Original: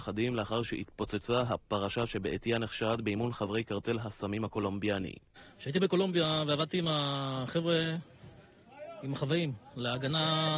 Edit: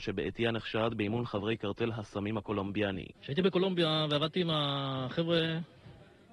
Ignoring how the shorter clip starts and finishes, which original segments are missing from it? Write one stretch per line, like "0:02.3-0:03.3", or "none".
0:05.2-0:05.5